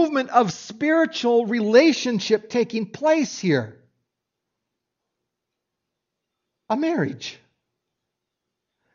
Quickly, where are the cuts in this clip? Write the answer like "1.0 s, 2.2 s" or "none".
none